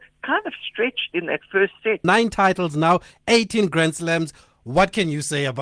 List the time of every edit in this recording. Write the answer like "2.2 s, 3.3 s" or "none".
2.0 s